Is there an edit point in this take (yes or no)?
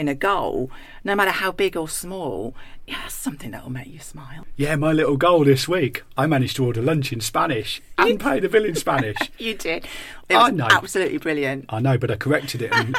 yes